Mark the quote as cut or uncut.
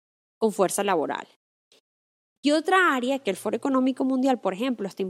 cut